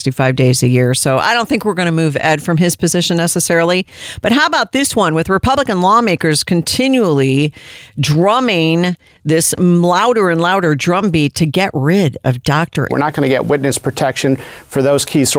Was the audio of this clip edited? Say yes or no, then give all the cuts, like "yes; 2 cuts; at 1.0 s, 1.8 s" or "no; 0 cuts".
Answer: yes; 1 cut; at 12.9 s